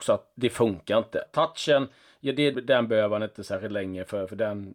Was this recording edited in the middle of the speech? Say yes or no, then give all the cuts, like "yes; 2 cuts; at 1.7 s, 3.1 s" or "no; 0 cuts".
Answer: yes; 2 cuts; at 1.3 s, 2.5 s